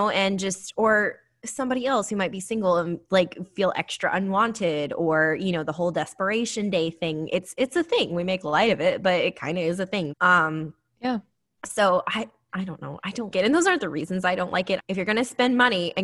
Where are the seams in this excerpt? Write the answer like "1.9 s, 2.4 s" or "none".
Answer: 10.1 s, 13.3 s, 14.8 s